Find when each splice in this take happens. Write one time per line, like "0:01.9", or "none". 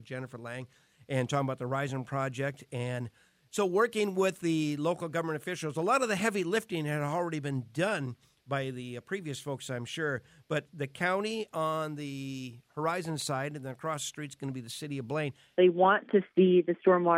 0:15.5